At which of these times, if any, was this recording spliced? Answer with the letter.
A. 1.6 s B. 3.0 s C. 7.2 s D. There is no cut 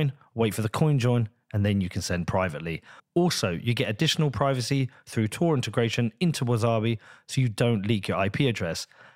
B